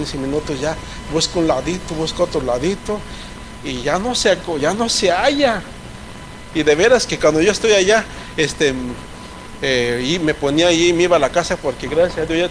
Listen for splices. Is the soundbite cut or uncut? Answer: uncut